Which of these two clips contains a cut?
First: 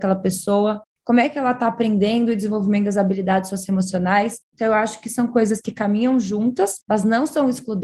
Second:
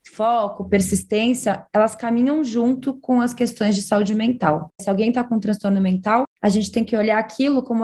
second; 1 cut; at 4.8 s

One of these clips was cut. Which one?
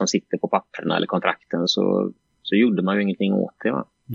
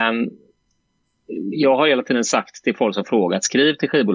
first; 1 cut; at 1.7 s

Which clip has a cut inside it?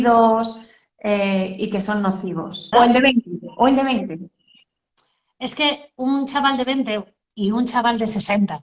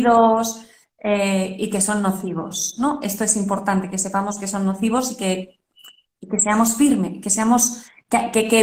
first; 1 cut; at 2.7 s

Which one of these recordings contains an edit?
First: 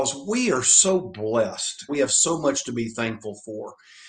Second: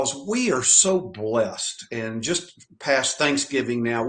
first; 1 cut; at 1.9 s

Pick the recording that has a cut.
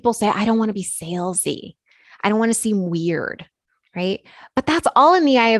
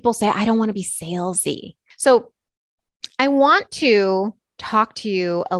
second; 1 cut; at 1.9 s

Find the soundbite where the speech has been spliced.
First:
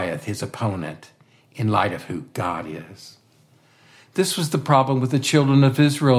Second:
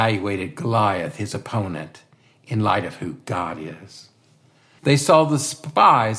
second; 1 cut; at 4.8 s

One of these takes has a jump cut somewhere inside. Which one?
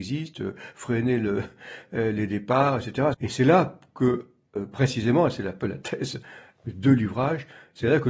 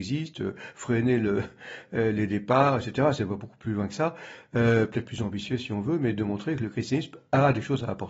first; 1 cut; at 3.1 s

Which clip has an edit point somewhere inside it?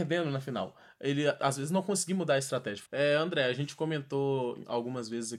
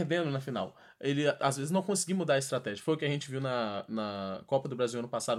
first; 1 cut; at 2.8 s

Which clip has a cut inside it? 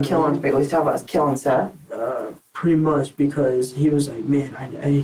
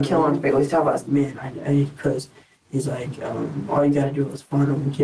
second; 1 cut; at 1.1 s

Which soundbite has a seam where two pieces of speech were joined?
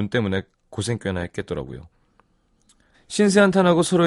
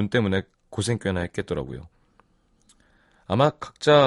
first; 1 cut; at 2.9 s

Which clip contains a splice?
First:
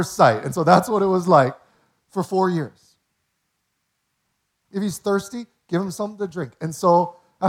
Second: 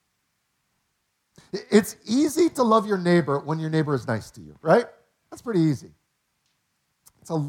first; 1 cut; at 4.6 s

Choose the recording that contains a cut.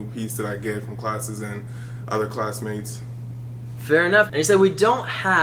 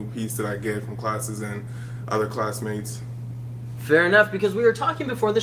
first; 1 cut; at 4.3 s

